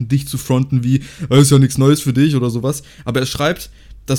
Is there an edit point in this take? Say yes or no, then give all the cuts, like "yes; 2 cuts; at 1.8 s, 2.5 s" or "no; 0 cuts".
no; 0 cuts